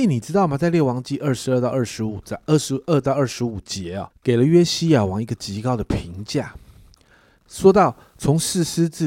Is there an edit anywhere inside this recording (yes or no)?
yes